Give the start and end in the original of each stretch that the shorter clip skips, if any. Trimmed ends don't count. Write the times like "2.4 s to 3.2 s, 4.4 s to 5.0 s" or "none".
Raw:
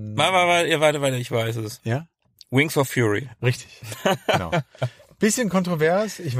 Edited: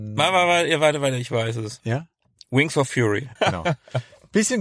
3.4 s to 4.2 s

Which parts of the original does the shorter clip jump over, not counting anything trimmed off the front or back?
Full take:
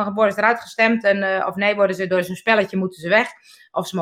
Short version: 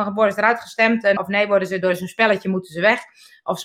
1.2 s to 1.4 s

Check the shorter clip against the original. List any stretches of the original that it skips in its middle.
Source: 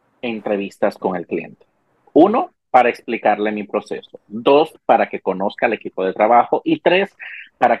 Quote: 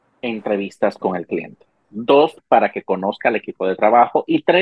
1.8 s to 4.2 s

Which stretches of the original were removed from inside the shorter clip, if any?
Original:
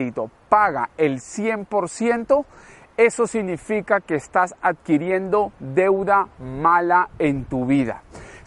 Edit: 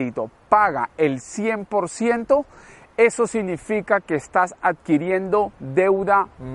none

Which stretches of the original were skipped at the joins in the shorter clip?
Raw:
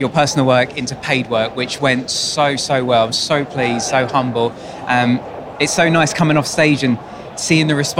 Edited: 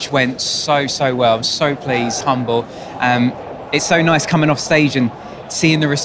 3.9 s to 4.1 s

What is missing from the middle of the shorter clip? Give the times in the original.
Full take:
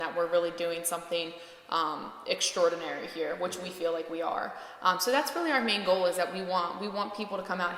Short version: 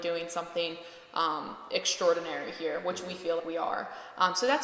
4.0 s to 4.0 s

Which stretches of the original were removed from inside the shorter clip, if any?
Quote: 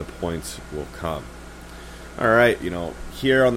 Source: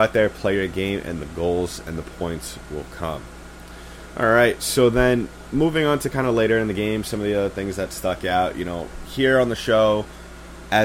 4.6 s to 8.5 s

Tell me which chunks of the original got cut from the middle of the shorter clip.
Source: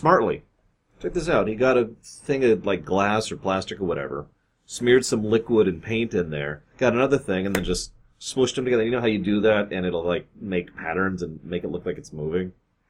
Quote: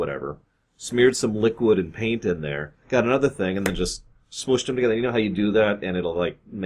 none

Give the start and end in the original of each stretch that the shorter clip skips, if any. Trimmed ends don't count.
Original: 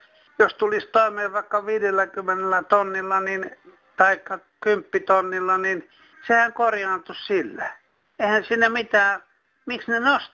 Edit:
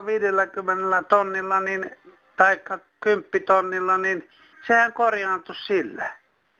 none

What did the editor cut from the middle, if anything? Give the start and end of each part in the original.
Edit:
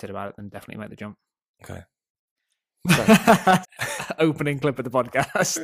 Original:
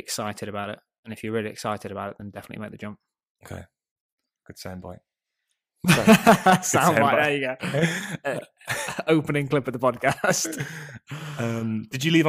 4.2 s to 5.3 s, 6.6 s to 8.5 s

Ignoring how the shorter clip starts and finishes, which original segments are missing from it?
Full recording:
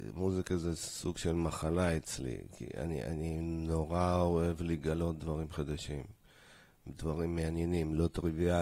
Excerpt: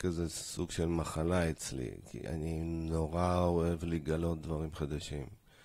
2.7 s to 3.0 s

